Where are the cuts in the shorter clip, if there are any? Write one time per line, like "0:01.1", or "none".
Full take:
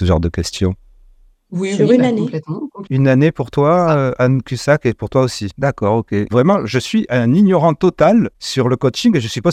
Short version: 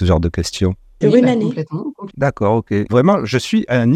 0:01.0
0:02.1